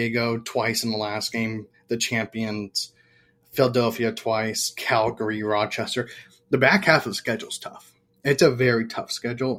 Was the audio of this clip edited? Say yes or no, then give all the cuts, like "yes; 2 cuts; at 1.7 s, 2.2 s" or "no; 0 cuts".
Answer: no; 0 cuts